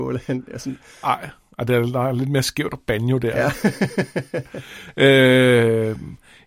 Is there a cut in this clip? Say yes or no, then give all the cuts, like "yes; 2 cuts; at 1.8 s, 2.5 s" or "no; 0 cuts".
no; 0 cuts